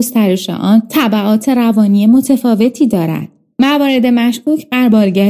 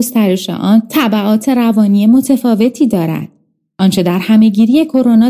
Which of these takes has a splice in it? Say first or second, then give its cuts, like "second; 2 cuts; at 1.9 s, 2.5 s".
first; 1 cut; at 3.5 s